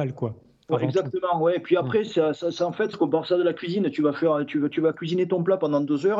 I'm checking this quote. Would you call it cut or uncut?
cut